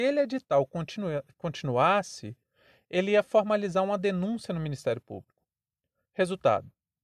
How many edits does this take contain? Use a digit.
0